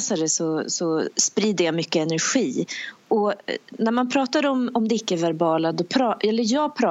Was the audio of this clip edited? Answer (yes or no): no